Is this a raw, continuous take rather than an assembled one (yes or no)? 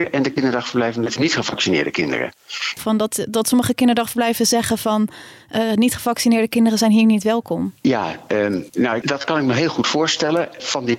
no